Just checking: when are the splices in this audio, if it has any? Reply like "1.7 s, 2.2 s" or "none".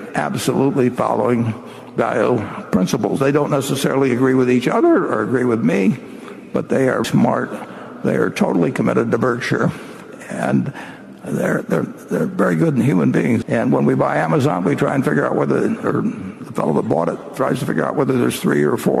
7.0 s, 13.4 s